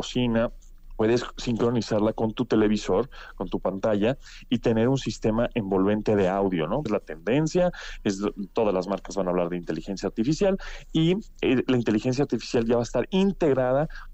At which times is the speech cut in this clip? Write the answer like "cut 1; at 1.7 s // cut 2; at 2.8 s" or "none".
cut 1; at 6.9 s

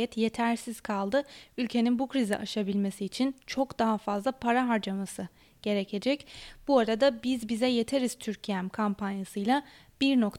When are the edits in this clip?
none

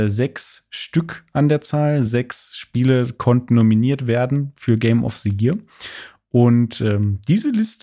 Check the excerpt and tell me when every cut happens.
none

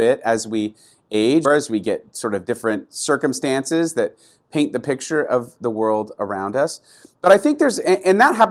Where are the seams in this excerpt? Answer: cut 1; at 1.4 s

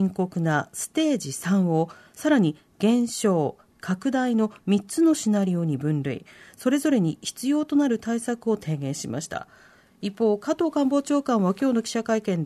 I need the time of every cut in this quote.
cut 1; at 3.7 s

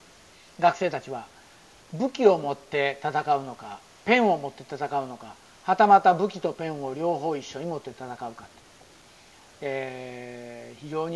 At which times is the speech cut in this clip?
none

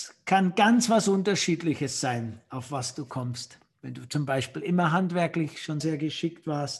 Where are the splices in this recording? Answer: cut 1; at 5.8 s

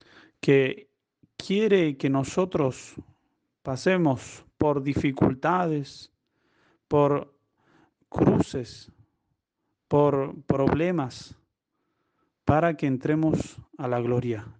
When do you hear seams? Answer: none

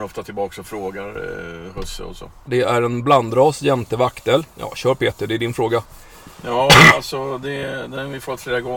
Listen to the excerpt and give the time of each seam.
cut 1; at 2.5 s

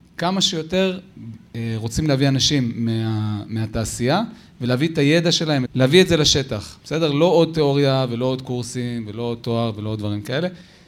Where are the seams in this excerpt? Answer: cut 1; at 5.7 s

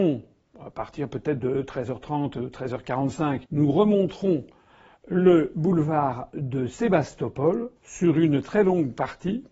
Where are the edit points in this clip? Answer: cut 1; at 3.5 s // cut 2; at 7.8 s

